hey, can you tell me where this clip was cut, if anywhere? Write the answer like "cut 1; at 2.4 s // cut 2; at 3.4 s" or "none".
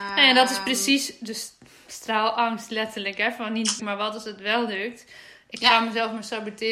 cut 1; at 3.8 s